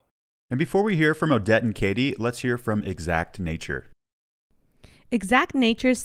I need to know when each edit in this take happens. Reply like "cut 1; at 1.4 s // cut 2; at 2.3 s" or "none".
none